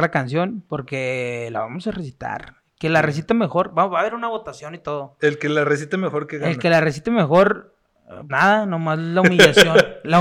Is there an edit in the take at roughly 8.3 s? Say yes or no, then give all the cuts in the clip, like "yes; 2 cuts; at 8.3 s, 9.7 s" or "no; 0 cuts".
yes; 1 cut; at 8.3 s